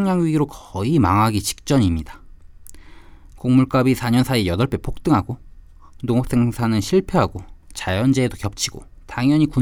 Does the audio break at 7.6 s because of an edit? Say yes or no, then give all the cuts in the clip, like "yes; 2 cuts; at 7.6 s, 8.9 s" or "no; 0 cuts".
yes; 1 cut; at 7.6 s